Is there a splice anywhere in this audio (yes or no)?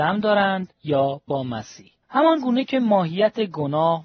yes